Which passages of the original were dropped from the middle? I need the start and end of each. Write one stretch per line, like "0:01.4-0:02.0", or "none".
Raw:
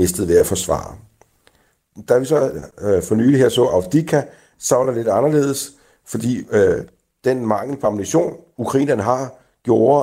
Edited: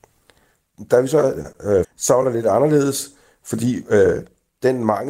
0:03.0-0:04.5